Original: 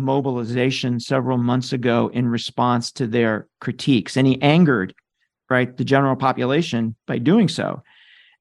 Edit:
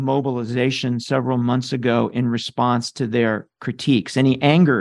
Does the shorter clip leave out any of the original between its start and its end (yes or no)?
no